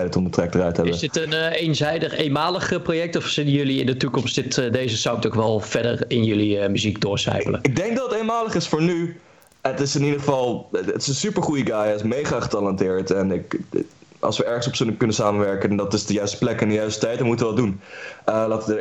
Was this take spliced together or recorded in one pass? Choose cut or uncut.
uncut